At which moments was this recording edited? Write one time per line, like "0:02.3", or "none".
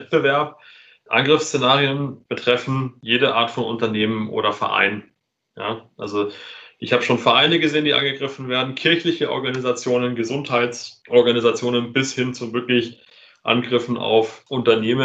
none